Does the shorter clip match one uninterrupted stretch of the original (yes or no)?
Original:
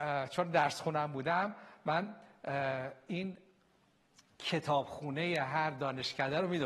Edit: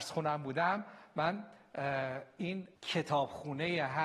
no